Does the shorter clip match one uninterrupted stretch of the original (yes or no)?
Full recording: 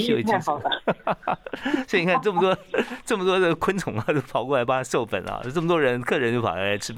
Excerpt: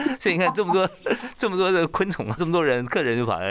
no